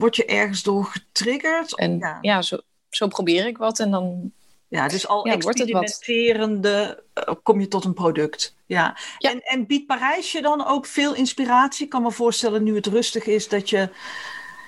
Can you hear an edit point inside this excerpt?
yes; 1 cut; at 1.8 s

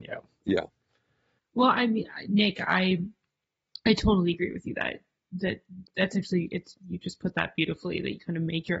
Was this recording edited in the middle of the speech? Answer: no; 0 cuts

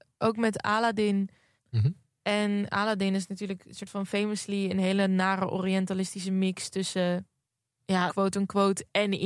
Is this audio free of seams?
no; 2 cuts; at 1.6 s, 8.1 s

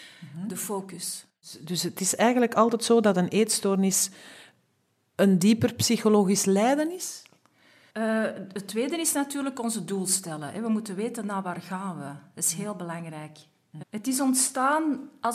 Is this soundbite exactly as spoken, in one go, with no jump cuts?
no; 2 cuts; at 7.9 s, 13.8 s

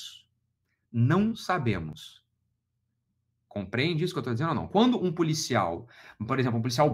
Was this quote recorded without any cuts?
yes; 0 cuts

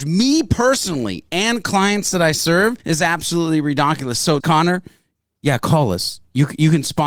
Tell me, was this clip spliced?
yes; 1 cut; at 4.4 s

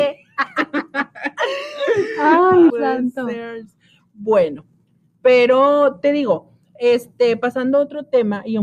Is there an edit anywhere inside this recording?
yes; 1 cut; at 2.7 s

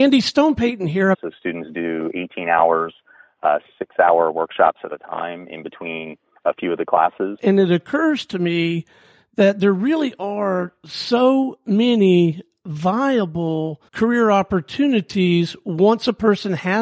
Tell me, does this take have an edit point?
yes; 3 cuts; at 1.1 s, 7.4 s, 13.9 s

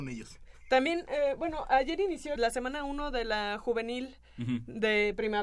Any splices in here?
yes; 1 cut; at 2.4 s

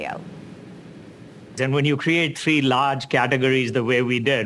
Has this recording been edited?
yes; 1 cut; at 1.6 s

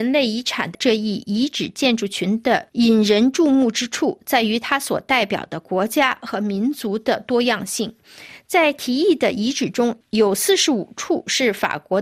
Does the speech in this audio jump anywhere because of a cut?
no; 0 cuts

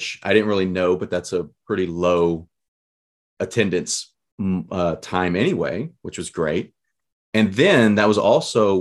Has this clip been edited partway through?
no; 0 cuts

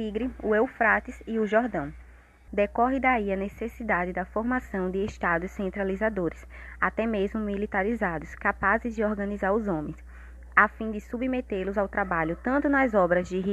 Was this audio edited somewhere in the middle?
yes; 1 cut; at 2.5 s

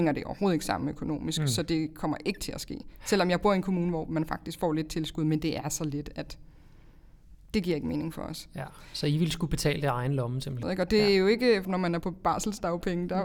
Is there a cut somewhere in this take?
yes; 2 cuts; at 10.6 s, 11.6 s

